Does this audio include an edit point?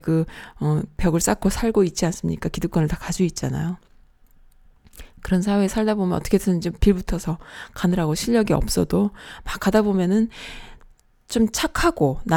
no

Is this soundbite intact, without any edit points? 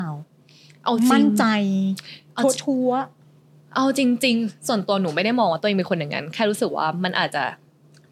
yes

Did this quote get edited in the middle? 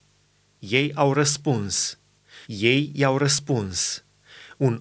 yes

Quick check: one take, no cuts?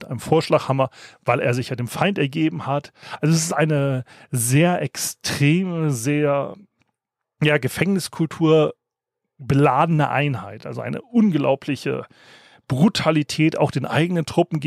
yes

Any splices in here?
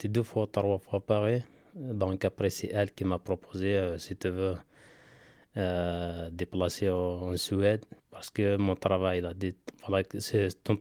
yes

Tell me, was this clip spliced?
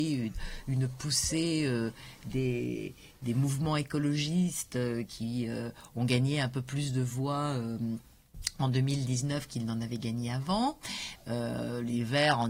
no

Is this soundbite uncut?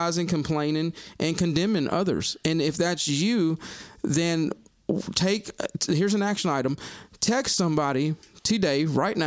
yes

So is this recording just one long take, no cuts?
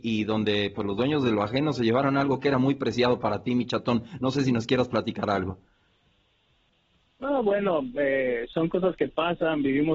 yes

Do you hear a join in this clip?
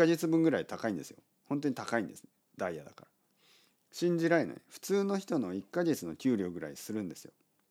no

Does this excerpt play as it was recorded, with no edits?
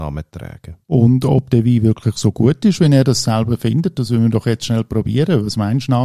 yes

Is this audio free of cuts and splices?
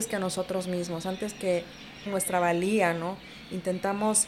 no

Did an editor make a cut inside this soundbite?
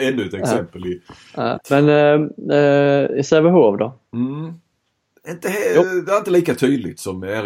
yes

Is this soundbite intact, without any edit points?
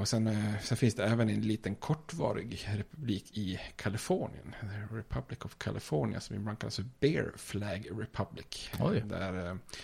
yes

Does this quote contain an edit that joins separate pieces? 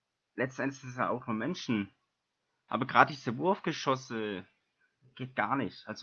yes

